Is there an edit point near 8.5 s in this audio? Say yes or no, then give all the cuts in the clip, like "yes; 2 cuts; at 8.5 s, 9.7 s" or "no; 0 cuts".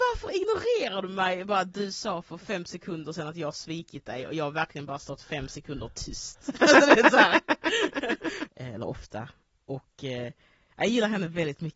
yes; 1 cut; at 8.5 s